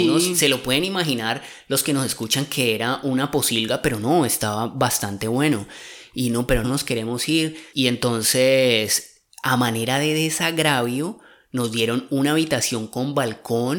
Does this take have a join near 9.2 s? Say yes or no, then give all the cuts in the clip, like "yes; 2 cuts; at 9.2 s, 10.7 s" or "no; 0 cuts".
no; 1 cut; at 6.6 s